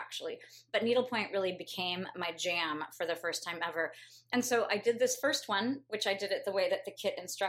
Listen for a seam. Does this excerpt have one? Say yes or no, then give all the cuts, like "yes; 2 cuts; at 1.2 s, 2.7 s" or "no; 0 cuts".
no; 0 cuts